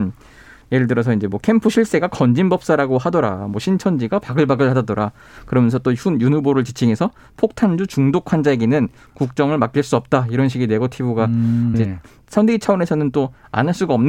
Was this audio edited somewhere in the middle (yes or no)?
yes